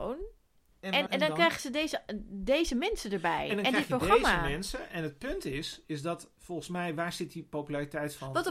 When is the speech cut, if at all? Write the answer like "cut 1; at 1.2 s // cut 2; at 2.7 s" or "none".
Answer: cut 1; at 1.1 s